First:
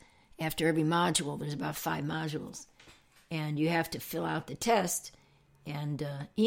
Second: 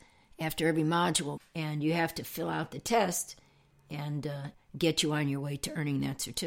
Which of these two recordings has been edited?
second; 2 cuts; at 1.4 s, 4.5 s

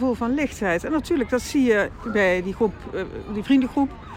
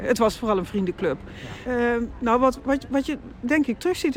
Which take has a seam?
second; 1 cut; at 1.6 s

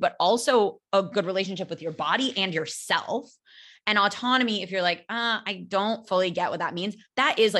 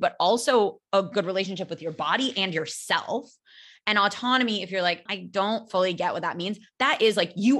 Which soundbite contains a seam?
second; 1 cut; at 5.1 s

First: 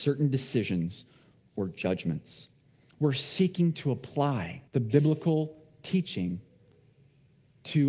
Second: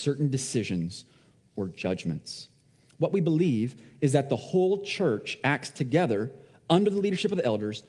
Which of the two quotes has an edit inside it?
first; 2 cuts; at 2.9 s, 4.7 s

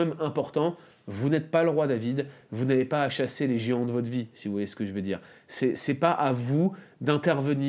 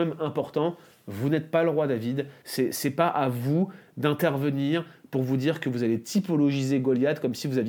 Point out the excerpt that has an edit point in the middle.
second; 1 cut; at 2.4 s

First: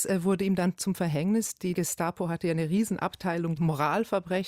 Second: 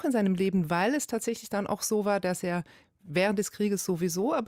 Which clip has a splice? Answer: first; 2 cuts; at 1.7 s, 3.6 s

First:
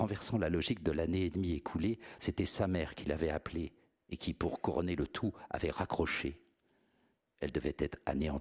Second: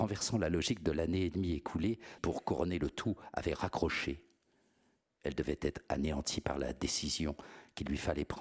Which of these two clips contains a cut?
second; 1 cut; at 2.2 s

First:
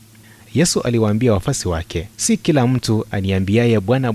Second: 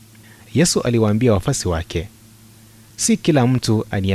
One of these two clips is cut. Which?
first; 1 cut; at 2.1 s

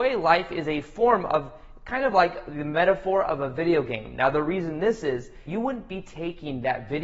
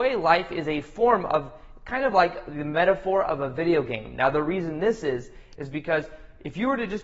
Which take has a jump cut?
first; 1 cut; at 5.5 s

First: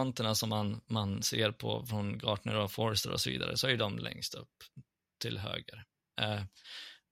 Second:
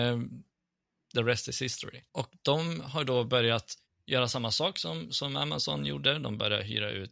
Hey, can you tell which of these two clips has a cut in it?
second; 1 cut; at 2.1 s

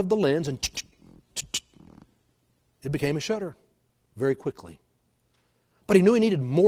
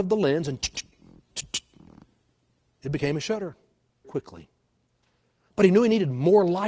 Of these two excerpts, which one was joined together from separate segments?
second; 1 cut; at 4.0 s

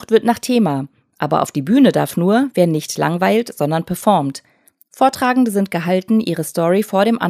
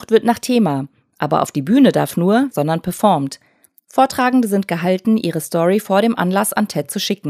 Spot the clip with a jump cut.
second; 1 cut; at 2.5 s

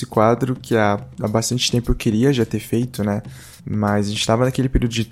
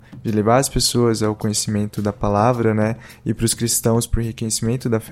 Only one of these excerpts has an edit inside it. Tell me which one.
first; 1 cut; at 3.6 s

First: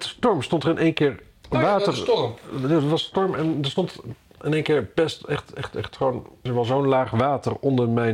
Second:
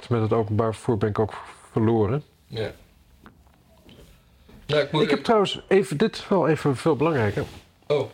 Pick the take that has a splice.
first; 1 cut; at 6.5 s

